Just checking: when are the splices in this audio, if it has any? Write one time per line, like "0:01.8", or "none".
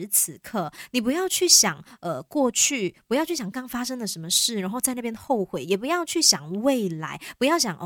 0:03.5